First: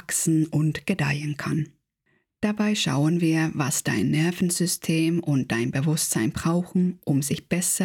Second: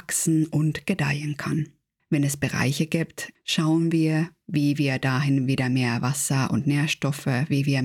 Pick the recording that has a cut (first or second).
second